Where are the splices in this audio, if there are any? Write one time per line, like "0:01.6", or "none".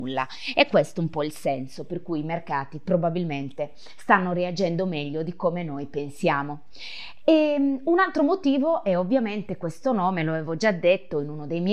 none